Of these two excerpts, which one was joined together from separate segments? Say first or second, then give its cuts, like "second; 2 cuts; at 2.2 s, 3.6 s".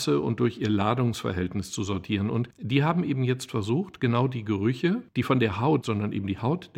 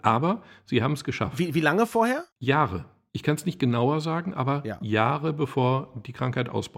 first; 1 cut; at 5.8 s